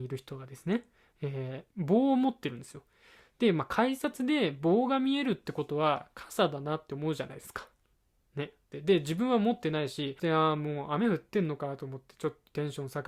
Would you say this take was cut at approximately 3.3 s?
no; 1 cut; at 8.7 s

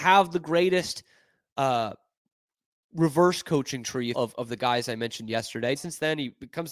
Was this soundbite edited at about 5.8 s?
yes; 2 cuts; at 4.1 s, 5.8 s

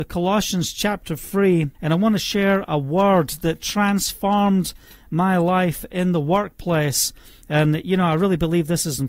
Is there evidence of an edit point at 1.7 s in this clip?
yes; 1 cut; at 1.7 s

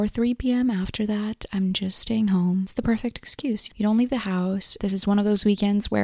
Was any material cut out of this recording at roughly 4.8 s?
yes; 2 cuts; at 3.7 s, 4.8 s

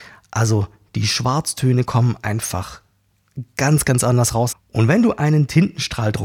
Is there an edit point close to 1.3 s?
no; 1 cut; at 4.5 s

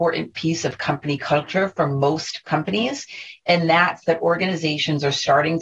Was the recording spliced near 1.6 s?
no; 1 cut; at 3.4 s

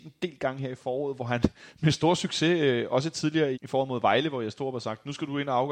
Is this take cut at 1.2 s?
no; 1 cut; at 3.5 s

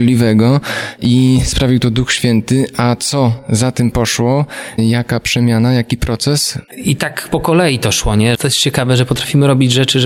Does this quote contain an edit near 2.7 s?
no; 2 cuts; at 6.7 s, 8.3 s

